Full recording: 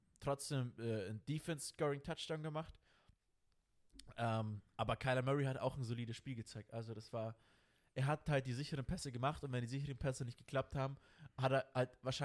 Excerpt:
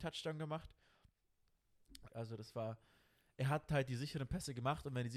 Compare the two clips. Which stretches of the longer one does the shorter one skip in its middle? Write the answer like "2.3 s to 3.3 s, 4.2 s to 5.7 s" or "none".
4.1 s to 6.7 s